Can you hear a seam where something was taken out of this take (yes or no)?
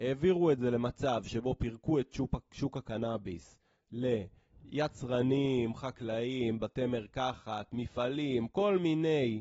no